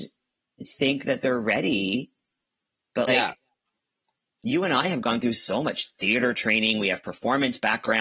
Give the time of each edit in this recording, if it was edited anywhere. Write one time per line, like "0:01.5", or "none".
0:03.1